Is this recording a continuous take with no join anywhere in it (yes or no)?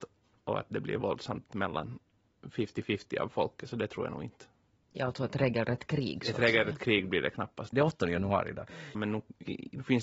no